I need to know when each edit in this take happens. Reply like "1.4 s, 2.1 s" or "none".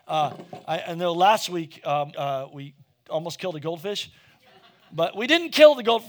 2.1 s